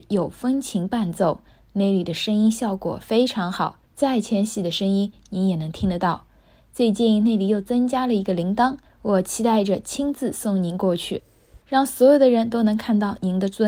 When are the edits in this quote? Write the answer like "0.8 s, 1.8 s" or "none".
3.8 s, 8.9 s, 11.6 s